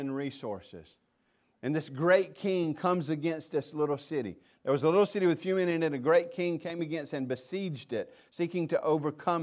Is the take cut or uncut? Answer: uncut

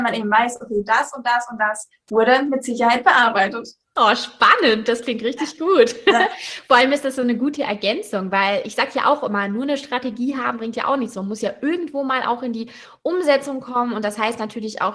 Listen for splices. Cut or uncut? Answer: uncut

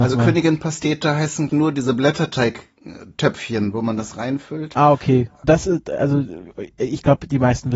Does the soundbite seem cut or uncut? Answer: cut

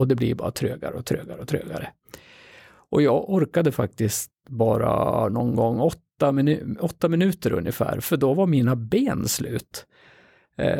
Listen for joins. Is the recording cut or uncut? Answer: uncut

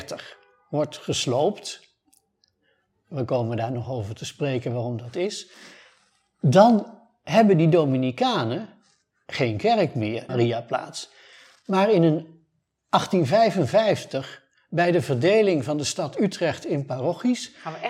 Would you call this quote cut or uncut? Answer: cut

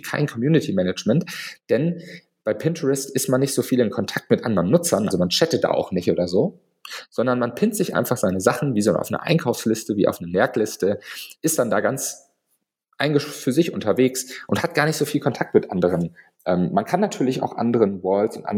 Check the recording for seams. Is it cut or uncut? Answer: cut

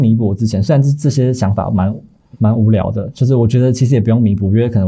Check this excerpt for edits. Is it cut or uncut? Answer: uncut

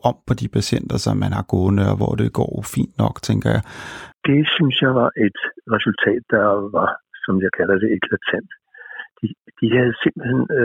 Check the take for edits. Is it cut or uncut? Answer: cut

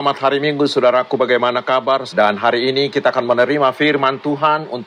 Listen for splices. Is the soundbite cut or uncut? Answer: cut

